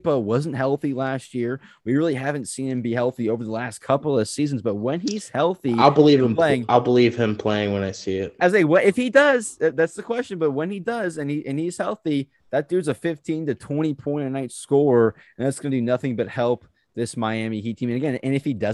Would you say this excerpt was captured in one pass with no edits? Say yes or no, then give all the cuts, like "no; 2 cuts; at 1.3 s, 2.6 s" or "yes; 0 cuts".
yes; 0 cuts